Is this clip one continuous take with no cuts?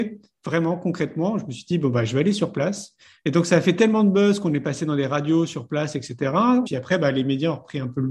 no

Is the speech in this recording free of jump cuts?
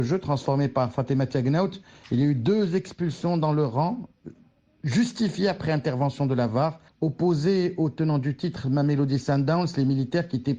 no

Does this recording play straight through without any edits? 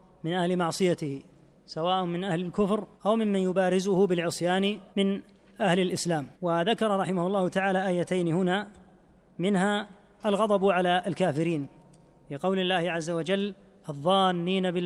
no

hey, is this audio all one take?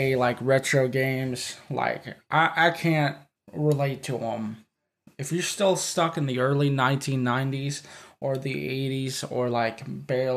no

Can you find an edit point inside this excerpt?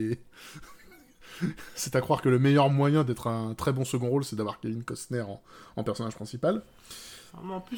no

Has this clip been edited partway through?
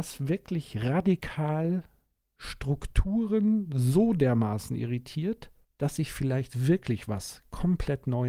no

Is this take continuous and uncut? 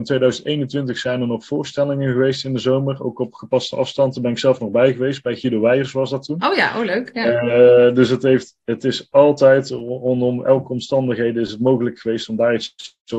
yes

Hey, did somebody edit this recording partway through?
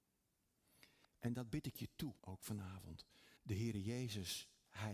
yes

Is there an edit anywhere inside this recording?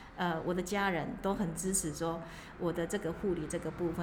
no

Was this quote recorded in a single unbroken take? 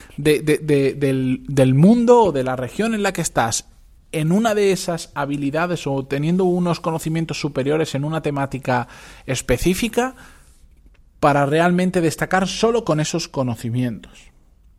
yes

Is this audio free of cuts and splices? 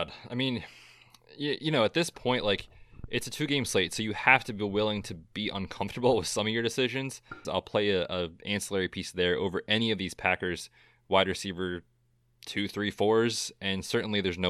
no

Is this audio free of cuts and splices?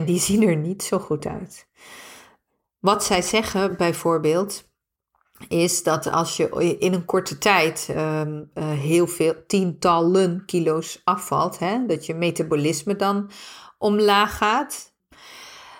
yes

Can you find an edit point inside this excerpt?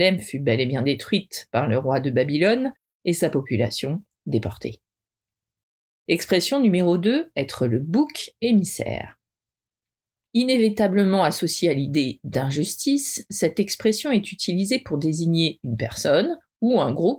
no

